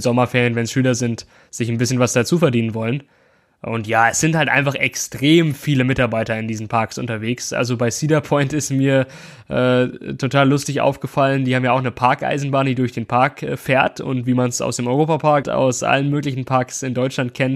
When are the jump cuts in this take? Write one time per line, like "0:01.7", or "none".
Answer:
0:15.4